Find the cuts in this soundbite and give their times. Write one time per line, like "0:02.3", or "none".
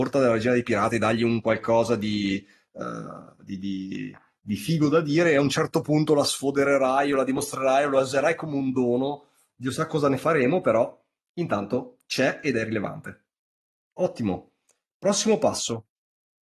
none